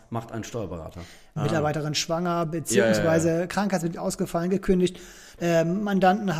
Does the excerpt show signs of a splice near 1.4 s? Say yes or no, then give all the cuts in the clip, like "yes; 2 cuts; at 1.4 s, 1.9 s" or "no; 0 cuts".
yes; 2 cuts; at 1.4 s, 5.4 s